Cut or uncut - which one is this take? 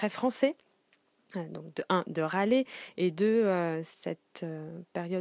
uncut